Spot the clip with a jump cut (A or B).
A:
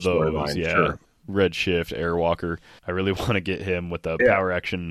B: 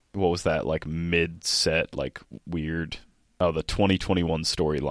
A